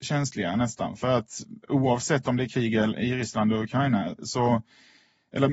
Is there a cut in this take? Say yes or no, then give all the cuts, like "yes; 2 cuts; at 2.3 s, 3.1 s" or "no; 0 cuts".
no; 0 cuts